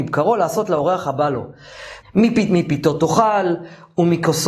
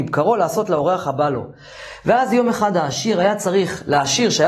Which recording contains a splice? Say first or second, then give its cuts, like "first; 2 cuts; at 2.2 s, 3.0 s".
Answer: first; 1 cut; at 2.0 s